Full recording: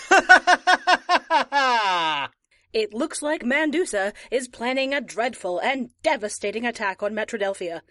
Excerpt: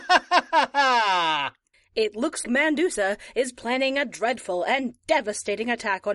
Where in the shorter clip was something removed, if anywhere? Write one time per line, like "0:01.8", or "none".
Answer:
0:02.4